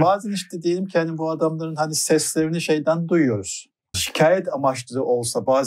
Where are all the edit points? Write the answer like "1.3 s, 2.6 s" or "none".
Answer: 3.9 s